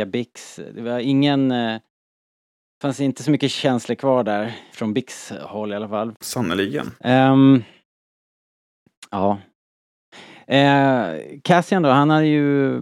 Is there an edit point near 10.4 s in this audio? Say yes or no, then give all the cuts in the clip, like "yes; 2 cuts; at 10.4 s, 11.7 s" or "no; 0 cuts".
no; 2 cuts; at 4.7 s, 6.1 s